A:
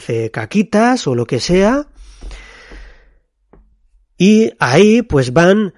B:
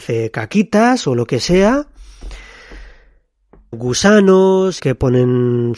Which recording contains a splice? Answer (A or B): B